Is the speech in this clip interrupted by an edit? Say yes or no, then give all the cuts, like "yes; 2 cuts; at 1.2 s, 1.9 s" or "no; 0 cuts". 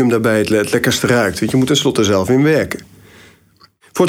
yes; 1 cut; at 1.7 s